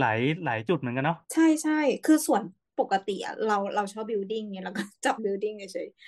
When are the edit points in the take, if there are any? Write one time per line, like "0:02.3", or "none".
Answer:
0:01.2
0:05.2